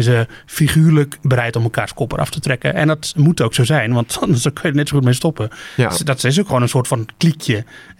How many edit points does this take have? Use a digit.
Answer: 1